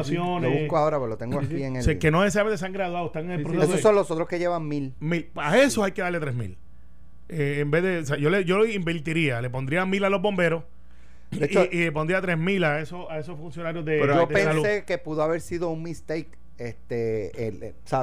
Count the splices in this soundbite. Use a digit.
0